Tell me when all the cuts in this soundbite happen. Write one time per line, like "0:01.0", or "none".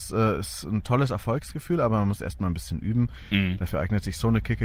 none